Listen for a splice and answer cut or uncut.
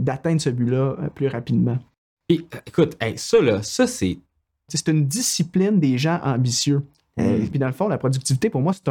cut